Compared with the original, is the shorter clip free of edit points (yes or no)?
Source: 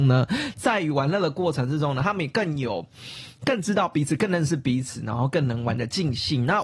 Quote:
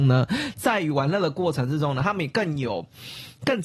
yes